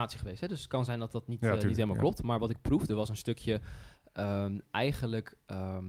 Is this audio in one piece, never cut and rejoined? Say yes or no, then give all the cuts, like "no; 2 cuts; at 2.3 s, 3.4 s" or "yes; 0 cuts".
yes; 0 cuts